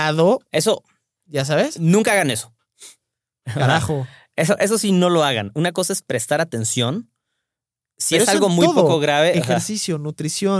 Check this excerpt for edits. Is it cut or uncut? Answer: uncut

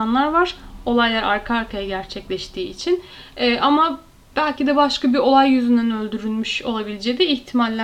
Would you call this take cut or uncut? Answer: uncut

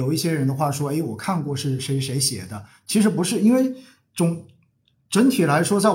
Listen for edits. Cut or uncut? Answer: uncut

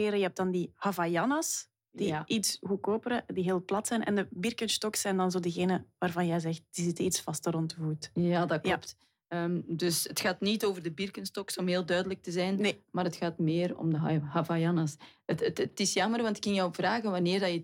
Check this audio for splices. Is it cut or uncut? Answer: uncut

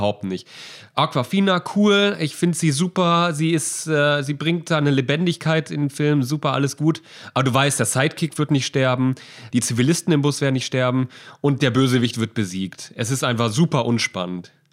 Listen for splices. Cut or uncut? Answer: cut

